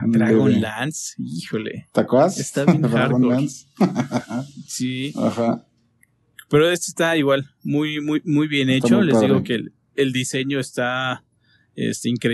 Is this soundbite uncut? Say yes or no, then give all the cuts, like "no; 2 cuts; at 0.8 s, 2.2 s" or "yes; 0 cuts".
yes; 0 cuts